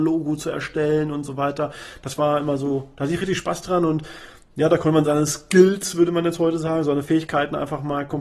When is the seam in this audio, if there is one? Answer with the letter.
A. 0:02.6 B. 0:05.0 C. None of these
B